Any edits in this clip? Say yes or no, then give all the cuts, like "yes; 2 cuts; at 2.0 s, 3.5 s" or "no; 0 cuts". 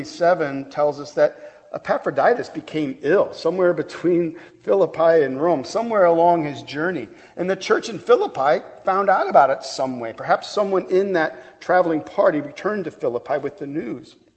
no; 0 cuts